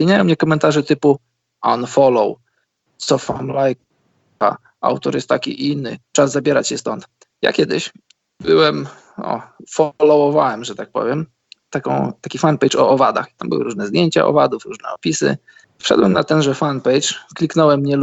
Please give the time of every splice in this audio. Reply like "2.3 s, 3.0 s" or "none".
15.6 s